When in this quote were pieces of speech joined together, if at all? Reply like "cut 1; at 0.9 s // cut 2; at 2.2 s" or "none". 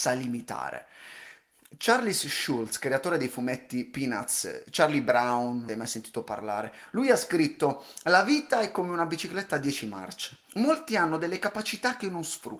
cut 1; at 5.7 s // cut 2; at 10.5 s